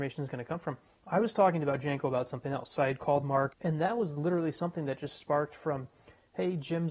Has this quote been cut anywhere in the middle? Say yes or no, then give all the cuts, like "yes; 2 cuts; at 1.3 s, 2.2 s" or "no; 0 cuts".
yes; 1 cut; at 3.5 s